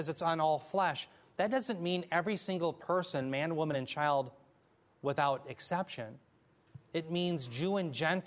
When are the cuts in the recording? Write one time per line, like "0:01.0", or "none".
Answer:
none